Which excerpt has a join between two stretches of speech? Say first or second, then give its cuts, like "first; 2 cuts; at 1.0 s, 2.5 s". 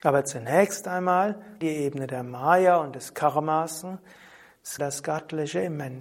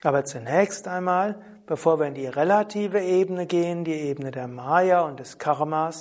first; 2 cuts; at 1.6 s, 4.8 s